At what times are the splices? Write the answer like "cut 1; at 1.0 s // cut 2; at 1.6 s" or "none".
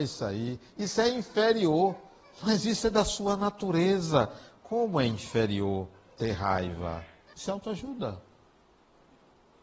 cut 1; at 7.3 s